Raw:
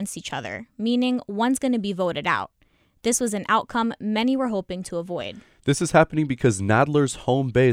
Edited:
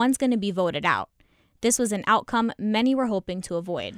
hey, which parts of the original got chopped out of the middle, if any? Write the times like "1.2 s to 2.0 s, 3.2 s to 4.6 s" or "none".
none